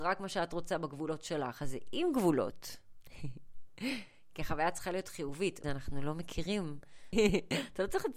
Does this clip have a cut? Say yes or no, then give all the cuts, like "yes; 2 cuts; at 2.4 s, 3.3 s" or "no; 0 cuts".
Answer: yes; 2 cuts; at 5.6 s, 7.1 s